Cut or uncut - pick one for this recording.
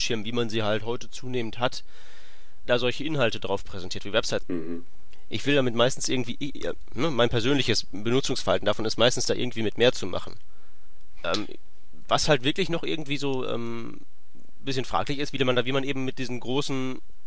cut